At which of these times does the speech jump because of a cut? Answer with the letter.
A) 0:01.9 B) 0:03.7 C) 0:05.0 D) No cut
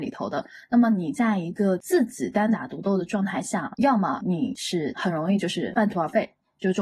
B